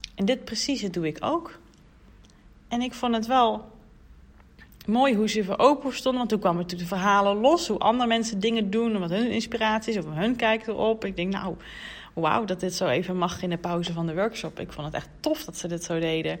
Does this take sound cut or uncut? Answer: uncut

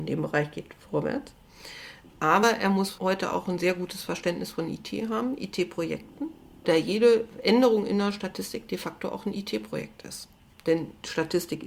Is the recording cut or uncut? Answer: uncut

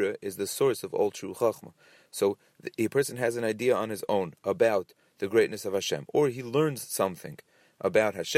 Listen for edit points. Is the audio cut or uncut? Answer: uncut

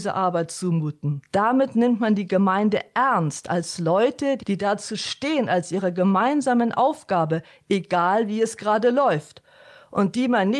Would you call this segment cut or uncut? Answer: cut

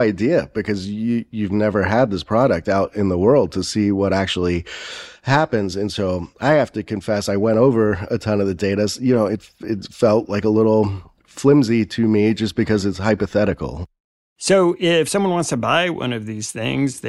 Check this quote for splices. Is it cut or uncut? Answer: uncut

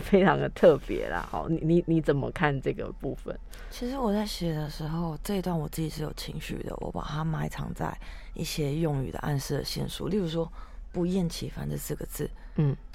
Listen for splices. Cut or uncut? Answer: uncut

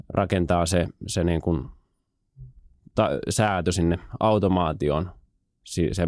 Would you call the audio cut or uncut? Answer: uncut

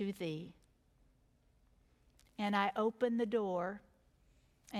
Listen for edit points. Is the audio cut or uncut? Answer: uncut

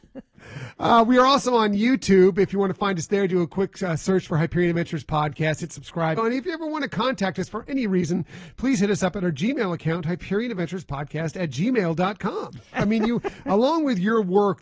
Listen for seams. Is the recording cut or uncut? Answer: cut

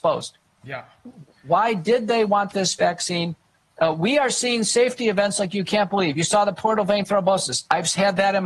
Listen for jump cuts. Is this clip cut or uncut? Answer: uncut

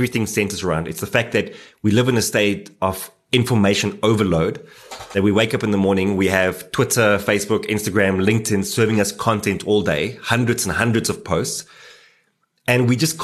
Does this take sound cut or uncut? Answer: uncut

